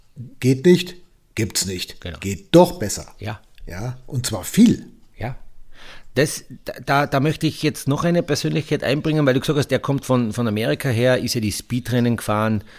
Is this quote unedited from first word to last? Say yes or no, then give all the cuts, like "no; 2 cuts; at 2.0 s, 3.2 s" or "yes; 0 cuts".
yes; 0 cuts